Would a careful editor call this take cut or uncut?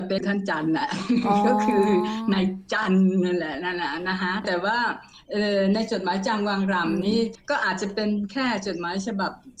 uncut